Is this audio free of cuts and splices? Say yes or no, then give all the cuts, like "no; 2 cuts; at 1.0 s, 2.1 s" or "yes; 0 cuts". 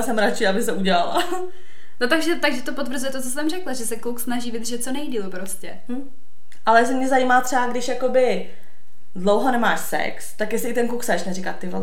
yes; 0 cuts